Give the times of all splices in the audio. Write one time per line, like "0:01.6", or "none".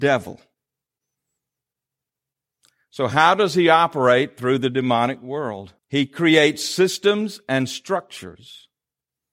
0:05.8

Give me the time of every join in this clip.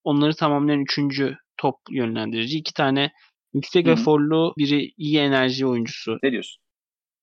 0:04.6
0:06.2

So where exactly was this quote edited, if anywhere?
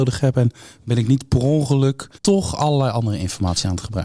0:02.2

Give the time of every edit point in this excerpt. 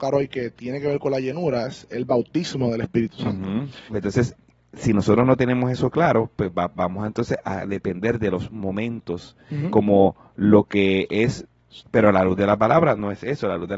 0:03.9
0:11.8

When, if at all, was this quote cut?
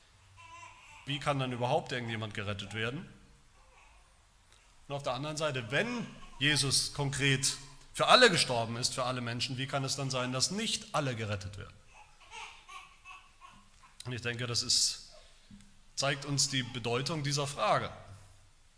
0:01.1

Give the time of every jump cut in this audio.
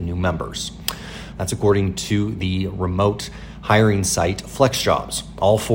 0:01.3

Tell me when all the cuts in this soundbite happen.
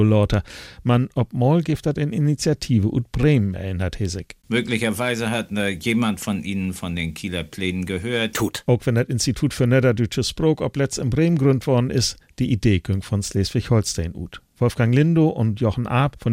0:08.3

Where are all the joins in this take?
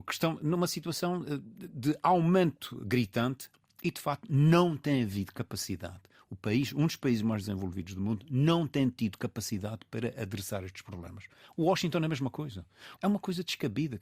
0:13.0

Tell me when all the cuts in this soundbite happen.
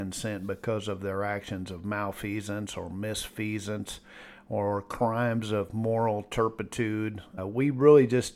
0:07.4

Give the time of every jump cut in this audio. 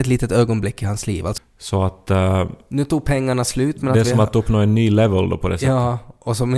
0:01.4

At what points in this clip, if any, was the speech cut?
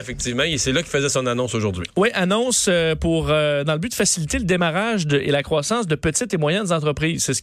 none

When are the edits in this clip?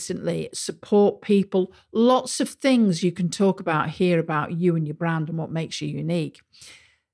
none

